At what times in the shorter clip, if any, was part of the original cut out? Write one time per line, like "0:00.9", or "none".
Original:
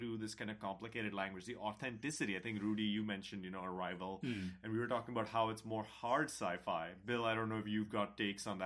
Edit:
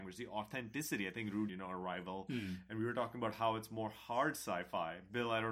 0:01.5